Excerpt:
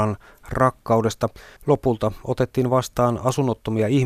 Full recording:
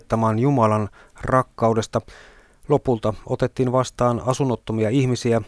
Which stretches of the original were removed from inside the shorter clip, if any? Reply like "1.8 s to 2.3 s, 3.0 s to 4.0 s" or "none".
2.3 s to 2.6 s

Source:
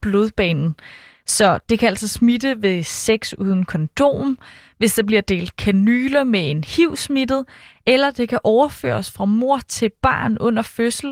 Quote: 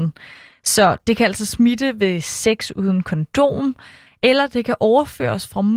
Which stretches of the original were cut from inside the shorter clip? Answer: 4.7 s to 7.7 s

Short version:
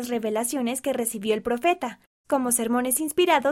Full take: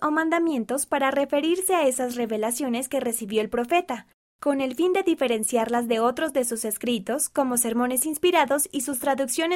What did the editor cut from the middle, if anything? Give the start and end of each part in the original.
4.3 s to 7.3 s

